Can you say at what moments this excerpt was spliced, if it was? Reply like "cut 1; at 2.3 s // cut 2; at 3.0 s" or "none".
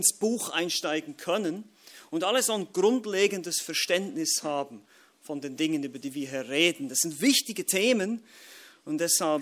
none